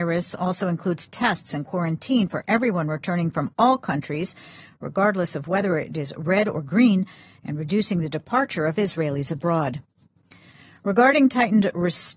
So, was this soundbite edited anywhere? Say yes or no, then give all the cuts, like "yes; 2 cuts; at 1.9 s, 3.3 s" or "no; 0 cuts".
no; 0 cuts